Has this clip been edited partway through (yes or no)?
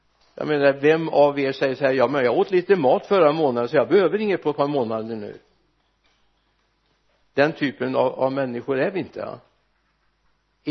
no